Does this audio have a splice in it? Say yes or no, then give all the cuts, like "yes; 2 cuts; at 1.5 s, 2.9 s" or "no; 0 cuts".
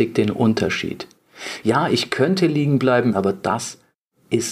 yes; 2 cuts; at 1.6 s, 3.1 s